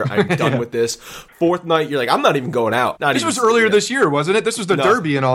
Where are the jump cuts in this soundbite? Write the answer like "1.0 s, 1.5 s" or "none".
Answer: 3.0 s

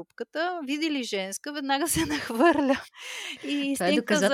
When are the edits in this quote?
none

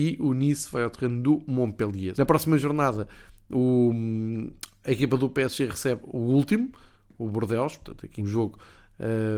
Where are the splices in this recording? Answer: 2.1 s, 8.2 s

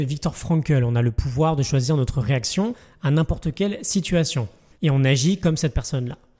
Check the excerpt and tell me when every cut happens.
4.7 s

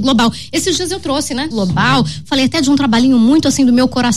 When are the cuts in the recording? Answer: 1.5 s

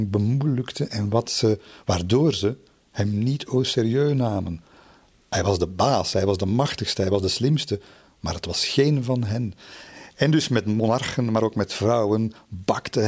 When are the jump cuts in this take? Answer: none

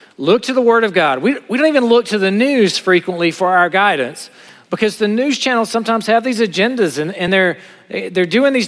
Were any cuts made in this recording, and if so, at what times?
none

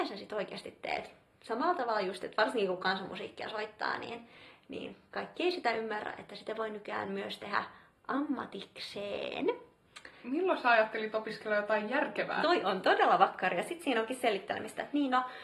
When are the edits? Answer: 10.2 s, 12.4 s

